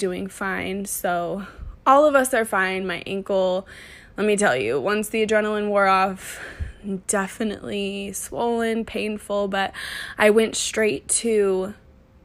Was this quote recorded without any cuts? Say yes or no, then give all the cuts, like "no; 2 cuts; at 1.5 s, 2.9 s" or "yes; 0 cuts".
yes; 0 cuts